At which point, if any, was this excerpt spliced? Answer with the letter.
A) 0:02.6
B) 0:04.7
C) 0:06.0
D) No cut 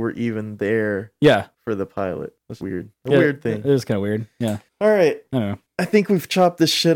A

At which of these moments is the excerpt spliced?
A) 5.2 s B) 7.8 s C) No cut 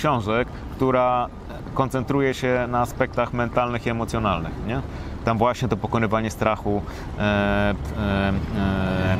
B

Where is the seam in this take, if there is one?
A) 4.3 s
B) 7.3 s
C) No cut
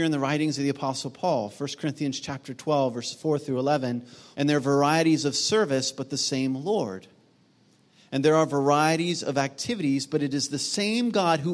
A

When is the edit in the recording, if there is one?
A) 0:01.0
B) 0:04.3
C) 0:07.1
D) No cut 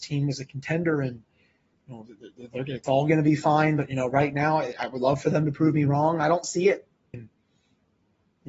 C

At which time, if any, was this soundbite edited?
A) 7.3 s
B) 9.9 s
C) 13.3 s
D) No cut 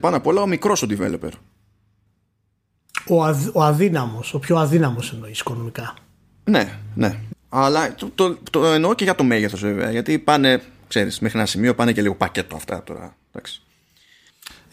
A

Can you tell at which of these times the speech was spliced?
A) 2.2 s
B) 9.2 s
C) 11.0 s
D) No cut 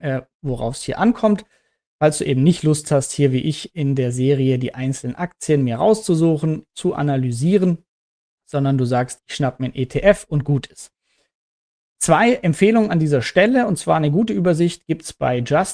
B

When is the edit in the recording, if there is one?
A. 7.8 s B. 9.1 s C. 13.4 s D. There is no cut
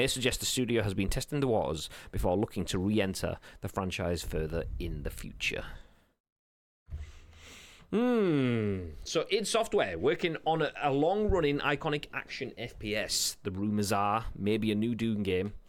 D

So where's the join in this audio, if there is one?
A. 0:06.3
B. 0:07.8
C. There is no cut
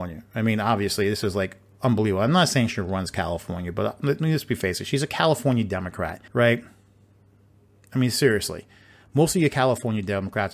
A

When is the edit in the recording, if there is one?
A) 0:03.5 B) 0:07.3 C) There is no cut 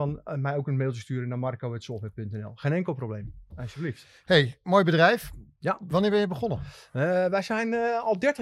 A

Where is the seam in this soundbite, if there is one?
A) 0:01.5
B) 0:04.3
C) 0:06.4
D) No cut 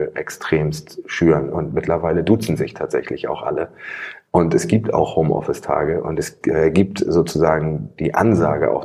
D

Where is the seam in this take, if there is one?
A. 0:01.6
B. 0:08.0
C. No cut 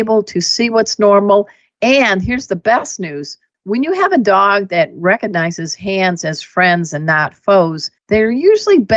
B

